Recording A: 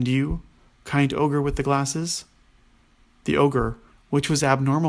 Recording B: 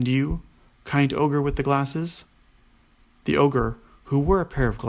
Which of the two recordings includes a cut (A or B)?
A